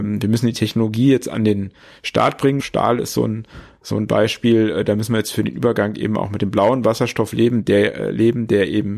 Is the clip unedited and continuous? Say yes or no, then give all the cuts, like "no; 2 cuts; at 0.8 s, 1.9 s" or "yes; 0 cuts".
no; 1 cut; at 2.6 s